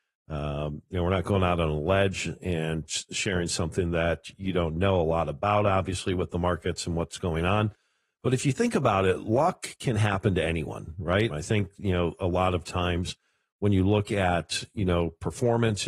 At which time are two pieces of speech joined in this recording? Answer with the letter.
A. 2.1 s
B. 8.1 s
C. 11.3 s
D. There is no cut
C